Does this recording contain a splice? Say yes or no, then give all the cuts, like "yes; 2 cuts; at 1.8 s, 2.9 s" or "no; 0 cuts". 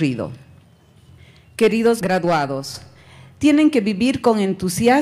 no; 0 cuts